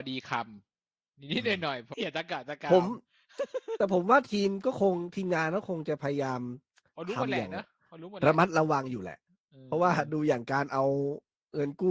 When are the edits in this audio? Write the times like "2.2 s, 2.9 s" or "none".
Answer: 1.9 s

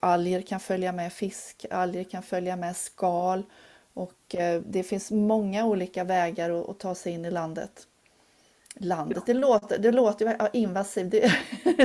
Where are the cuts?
4.6 s

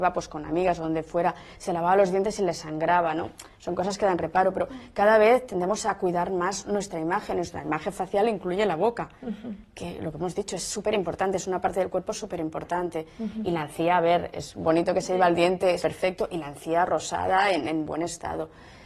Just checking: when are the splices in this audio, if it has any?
15.8 s

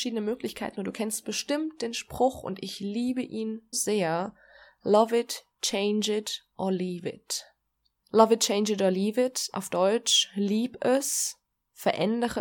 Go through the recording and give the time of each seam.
3.7 s, 8.0 s

